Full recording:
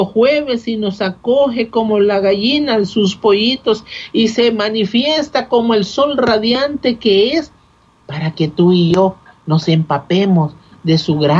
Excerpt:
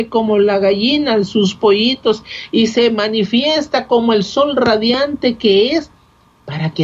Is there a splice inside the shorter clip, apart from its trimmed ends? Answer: no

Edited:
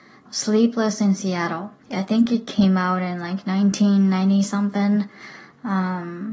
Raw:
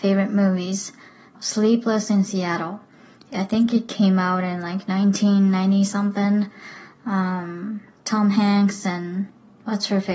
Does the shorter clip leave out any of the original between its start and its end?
yes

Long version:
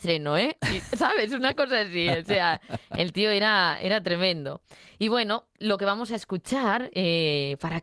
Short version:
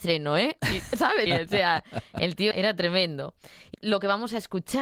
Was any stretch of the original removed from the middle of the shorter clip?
yes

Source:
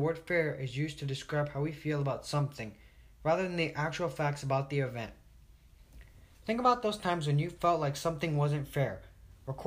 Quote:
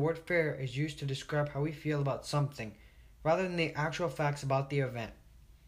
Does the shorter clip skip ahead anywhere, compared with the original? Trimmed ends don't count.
no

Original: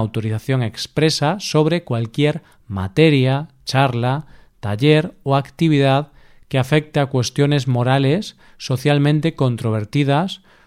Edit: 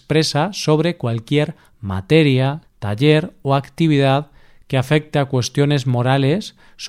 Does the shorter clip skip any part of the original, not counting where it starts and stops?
yes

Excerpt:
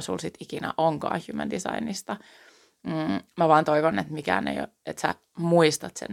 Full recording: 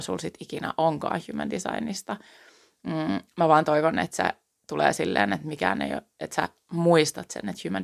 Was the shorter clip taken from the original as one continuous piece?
no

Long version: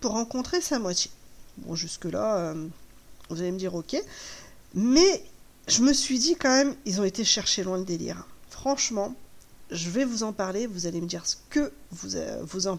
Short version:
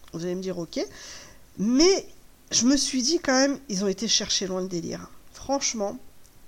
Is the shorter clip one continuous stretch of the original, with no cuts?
yes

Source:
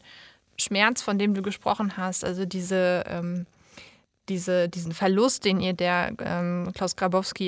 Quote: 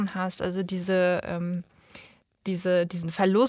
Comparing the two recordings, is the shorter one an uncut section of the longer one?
yes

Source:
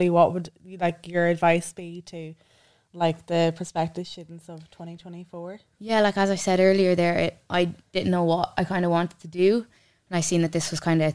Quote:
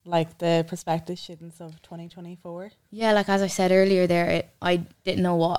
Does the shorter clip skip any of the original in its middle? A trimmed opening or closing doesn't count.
no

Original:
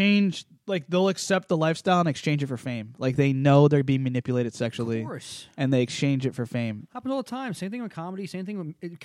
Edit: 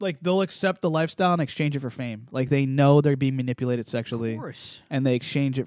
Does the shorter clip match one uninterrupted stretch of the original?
yes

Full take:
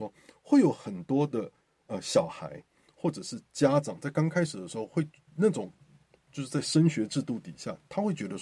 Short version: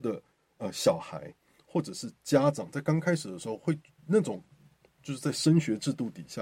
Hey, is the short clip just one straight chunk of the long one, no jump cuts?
yes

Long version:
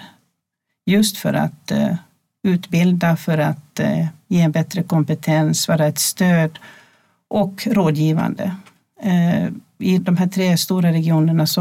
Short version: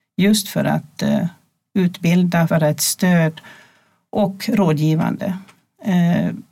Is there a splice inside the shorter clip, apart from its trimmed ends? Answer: yes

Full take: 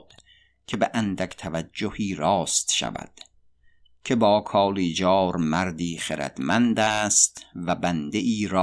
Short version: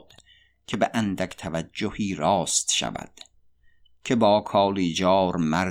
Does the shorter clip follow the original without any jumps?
yes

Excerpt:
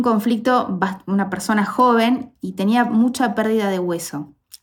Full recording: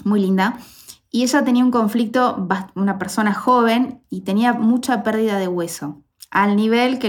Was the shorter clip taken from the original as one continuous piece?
yes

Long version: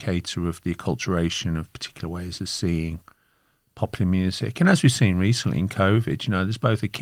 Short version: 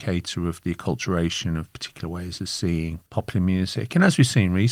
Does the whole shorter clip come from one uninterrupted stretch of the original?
no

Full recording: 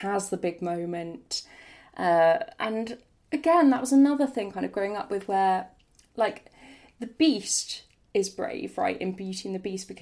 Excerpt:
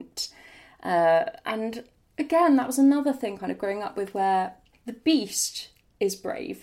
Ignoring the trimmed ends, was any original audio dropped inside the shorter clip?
yes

